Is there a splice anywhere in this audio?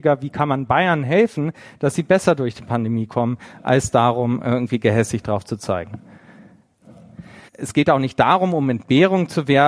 yes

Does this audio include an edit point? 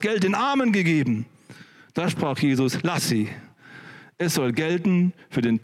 no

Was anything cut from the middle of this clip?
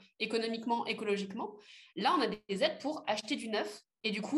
no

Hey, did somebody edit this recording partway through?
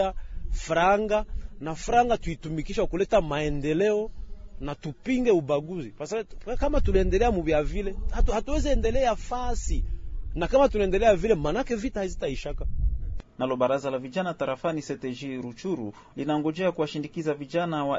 yes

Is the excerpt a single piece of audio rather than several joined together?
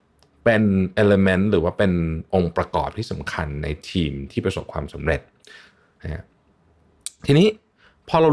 yes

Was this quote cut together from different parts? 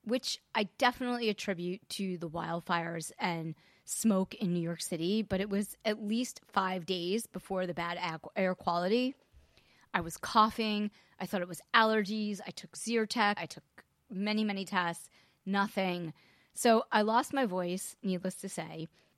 yes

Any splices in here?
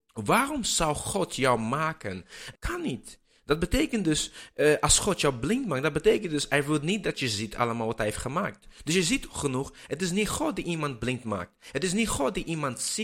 yes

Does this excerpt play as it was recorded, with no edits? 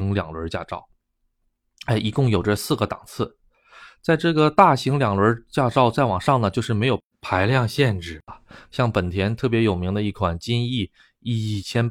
yes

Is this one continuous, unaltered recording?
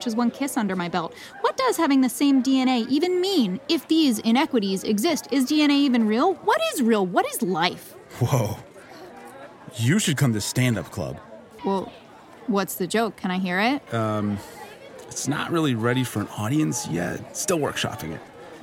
no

